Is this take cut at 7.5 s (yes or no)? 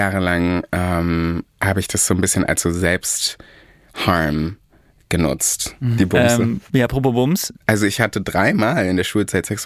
yes